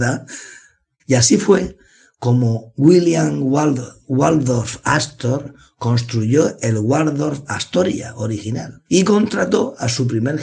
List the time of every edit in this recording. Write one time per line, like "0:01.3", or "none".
0:01.0
0:08.9